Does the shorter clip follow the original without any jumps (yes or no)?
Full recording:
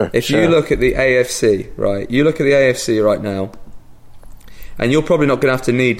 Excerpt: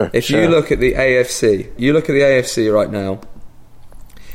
no